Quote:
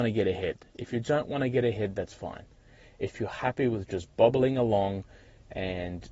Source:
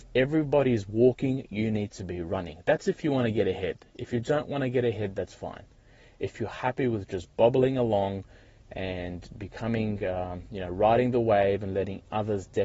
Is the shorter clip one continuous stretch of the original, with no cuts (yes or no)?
yes